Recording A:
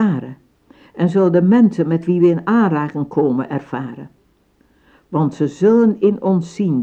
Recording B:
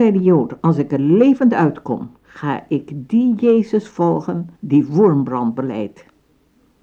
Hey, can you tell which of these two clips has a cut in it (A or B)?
B